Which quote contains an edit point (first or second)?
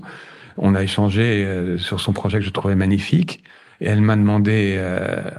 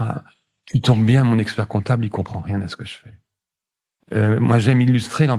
second